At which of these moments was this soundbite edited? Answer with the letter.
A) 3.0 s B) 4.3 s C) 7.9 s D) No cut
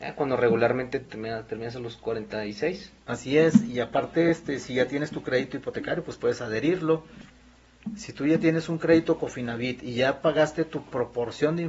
D